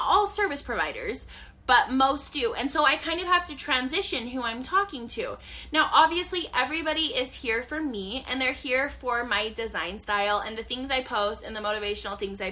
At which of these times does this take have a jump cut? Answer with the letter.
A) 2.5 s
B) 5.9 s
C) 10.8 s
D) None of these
D